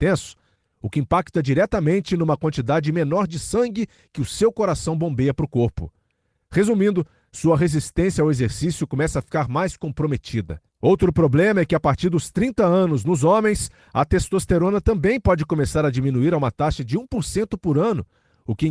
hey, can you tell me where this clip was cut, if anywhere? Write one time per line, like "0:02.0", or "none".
none